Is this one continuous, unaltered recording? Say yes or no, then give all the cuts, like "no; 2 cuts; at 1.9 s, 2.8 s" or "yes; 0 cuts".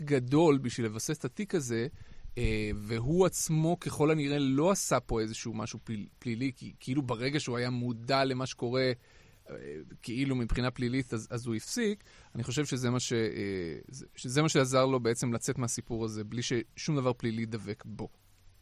yes; 0 cuts